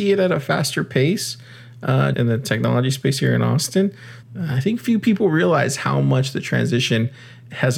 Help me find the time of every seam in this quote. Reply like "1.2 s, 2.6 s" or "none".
2.1 s, 4.2 s